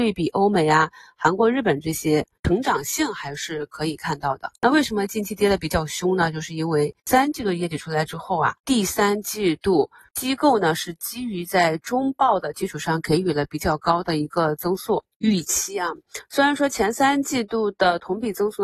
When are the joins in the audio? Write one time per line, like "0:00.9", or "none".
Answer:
none